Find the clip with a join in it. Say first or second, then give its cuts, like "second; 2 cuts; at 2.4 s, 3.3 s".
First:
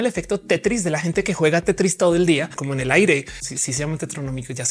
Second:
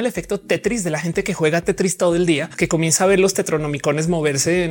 first; 1 cut; at 2.6 s